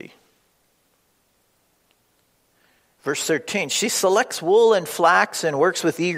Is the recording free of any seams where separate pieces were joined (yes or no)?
yes